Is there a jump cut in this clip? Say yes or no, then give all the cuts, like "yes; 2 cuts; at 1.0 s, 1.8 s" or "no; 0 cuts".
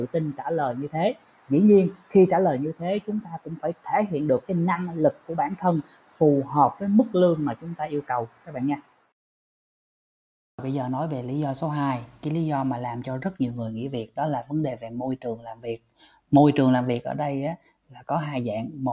no; 0 cuts